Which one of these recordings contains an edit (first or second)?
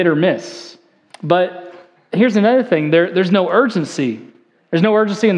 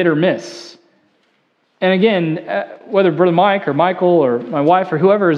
first